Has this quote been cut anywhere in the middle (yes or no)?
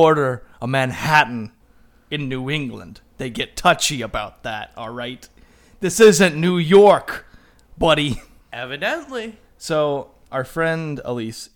yes